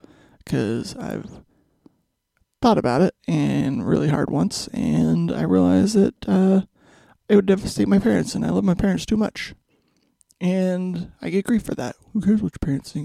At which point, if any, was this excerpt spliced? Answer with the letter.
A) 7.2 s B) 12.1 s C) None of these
B